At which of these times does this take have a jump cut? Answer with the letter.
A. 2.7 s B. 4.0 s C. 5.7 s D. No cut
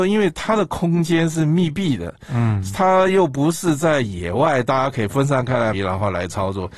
C